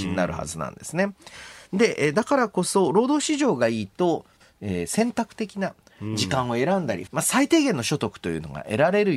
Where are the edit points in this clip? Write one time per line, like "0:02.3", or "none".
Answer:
0:04.4
0:07.1